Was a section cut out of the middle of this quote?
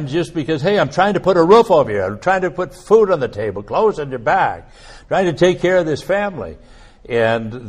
no; 0 cuts

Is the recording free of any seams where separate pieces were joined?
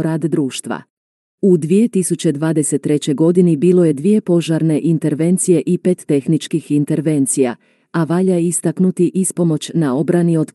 no; 2 cuts; at 1.3 s, 7.8 s

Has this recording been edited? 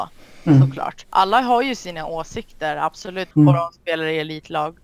yes; 1 cut; at 3.3 s

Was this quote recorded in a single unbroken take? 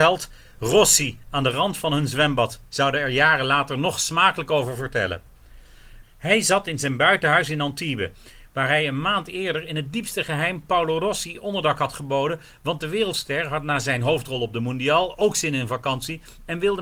no; 2 cuts; at 2.7 s, 6.0 s

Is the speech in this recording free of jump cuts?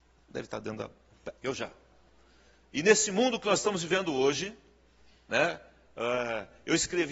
no; 1 cut; at 1.4 s

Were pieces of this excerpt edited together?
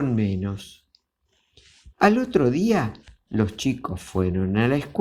yes; 1 cut; at 1.9 s

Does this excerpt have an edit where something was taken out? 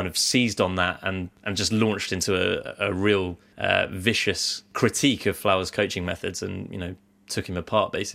no; 0 cuts

